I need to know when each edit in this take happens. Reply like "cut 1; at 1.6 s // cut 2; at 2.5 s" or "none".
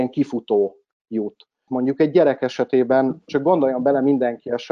cut 1; at 1.7 s